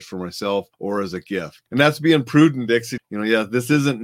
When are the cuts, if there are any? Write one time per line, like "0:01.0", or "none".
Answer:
0:01.7
0:03.0